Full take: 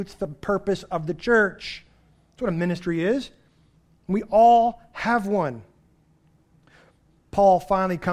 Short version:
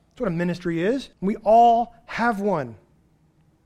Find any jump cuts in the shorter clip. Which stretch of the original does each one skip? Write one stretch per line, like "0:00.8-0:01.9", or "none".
0:03.3-0:04.0